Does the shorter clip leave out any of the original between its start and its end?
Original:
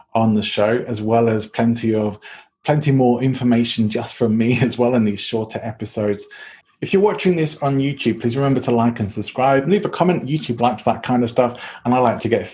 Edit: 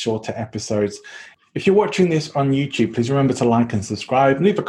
no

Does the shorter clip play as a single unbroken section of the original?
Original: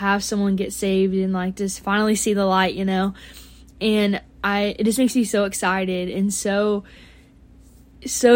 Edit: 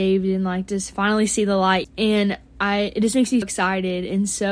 no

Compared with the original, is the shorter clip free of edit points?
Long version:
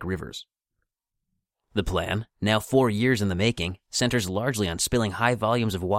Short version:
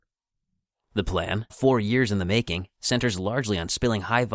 no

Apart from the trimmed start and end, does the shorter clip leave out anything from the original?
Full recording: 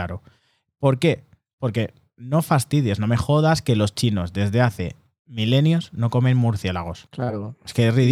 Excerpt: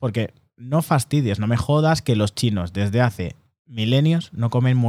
no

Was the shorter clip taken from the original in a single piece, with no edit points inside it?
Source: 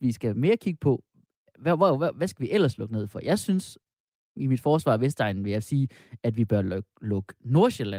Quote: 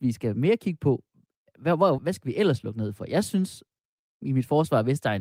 no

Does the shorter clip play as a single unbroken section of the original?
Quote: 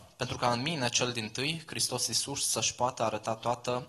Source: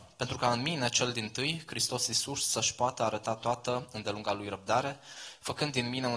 yes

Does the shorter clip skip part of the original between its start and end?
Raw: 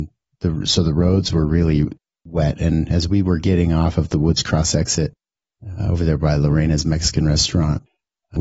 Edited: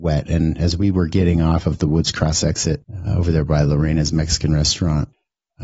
yes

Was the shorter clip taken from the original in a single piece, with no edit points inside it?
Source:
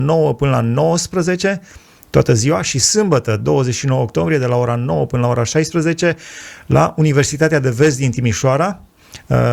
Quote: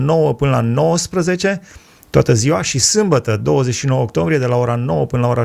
yes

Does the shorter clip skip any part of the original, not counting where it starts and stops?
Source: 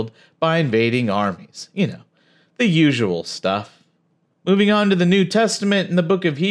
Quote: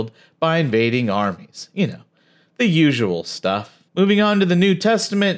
yes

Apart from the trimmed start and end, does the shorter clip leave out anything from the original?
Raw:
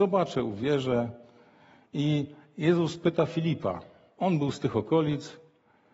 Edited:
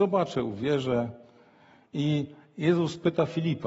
no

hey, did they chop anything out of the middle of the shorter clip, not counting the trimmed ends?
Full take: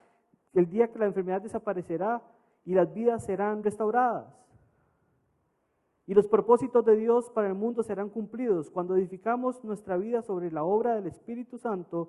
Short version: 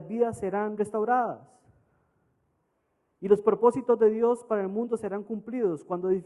no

